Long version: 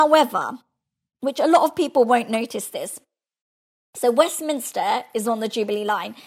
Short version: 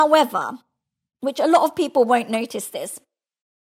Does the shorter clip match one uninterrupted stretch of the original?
yes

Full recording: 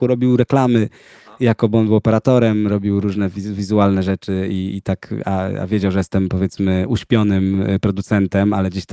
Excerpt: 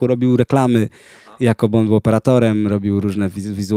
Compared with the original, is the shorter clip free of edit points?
yes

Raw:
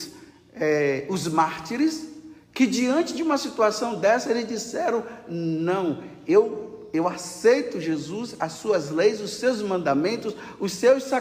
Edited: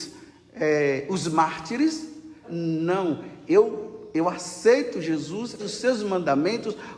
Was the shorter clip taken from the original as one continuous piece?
no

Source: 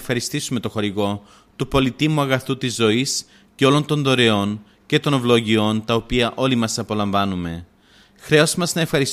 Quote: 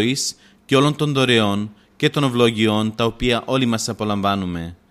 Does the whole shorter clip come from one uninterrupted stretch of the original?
yes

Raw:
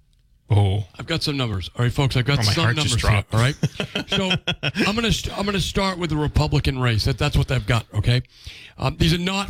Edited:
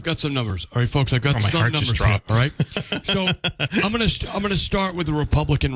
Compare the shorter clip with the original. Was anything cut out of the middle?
no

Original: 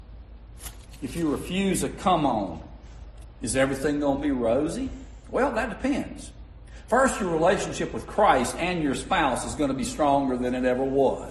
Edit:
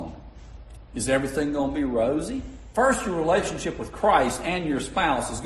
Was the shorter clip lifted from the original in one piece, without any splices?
no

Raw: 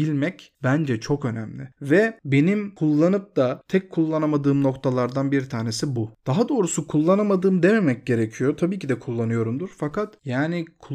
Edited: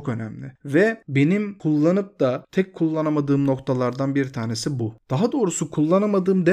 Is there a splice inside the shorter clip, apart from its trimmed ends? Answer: no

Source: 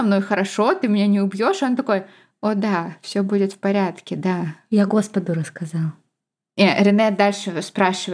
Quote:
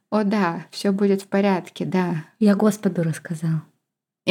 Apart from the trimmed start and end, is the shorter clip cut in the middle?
no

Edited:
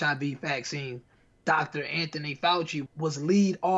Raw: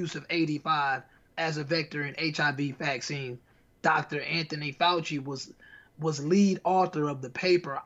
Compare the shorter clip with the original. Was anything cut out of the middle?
yes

